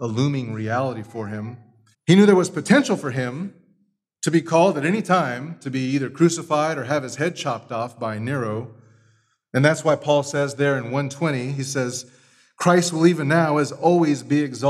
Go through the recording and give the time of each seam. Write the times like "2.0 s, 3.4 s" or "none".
1.9 s